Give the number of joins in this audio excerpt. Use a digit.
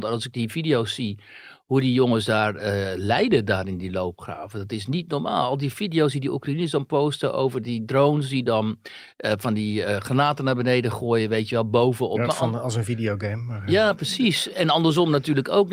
1